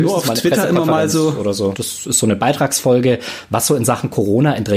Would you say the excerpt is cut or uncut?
cut